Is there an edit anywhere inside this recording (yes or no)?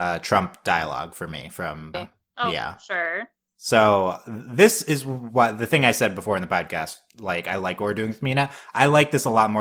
yes